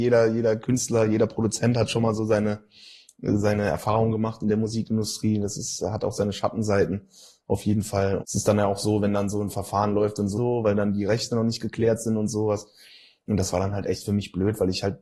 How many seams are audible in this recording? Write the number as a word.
two